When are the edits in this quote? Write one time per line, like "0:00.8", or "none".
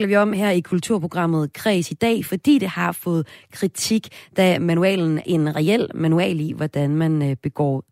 0:05.2